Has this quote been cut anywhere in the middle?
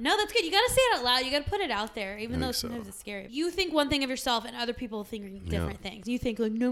yes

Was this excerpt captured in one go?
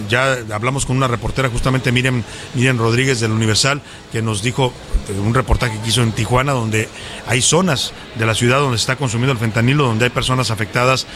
yes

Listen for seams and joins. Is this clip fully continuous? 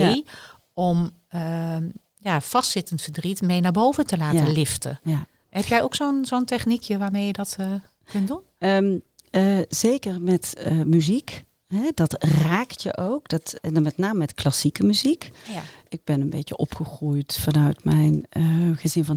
yes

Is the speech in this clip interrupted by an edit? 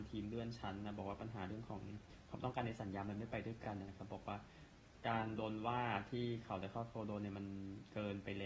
no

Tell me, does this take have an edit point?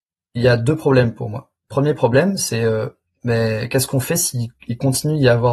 no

